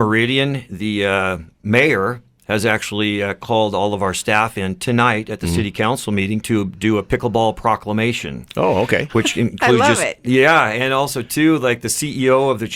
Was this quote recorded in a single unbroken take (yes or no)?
yes